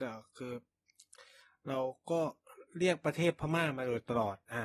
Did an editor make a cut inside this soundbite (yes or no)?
no